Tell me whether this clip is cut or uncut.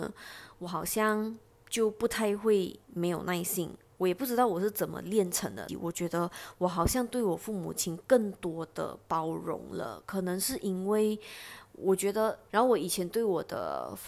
cut